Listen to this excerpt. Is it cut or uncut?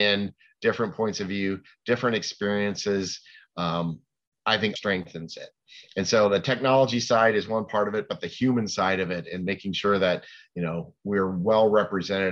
cut